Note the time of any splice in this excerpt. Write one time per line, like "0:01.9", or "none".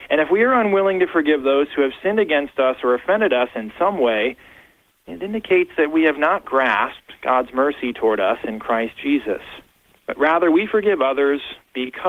0:06.4
0:10.0